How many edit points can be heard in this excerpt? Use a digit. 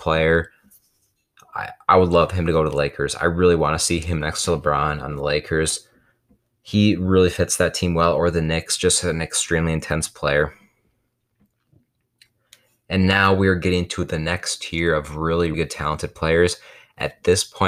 1